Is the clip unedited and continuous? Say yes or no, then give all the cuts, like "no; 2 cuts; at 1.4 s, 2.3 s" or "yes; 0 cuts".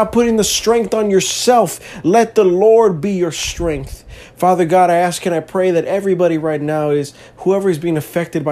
yes; 0 cuts